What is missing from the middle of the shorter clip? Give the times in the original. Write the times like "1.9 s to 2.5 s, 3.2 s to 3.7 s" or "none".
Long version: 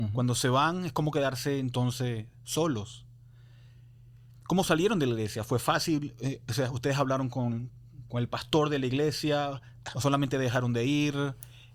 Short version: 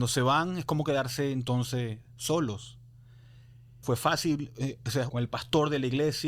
4.1 s to 5.5 s, 6.7 s to 8.1 s

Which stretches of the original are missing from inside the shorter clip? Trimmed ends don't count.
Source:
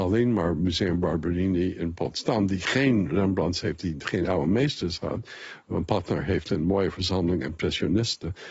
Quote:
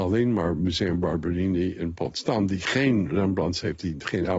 none

